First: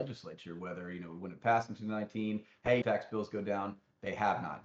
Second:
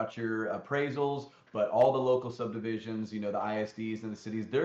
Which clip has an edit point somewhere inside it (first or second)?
first